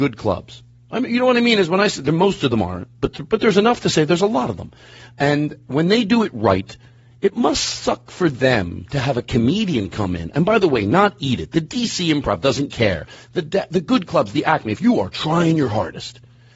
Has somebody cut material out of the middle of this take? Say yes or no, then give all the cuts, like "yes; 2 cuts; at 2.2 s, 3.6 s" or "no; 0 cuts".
no; 0 cuts